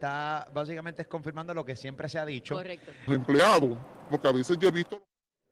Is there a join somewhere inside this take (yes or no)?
yes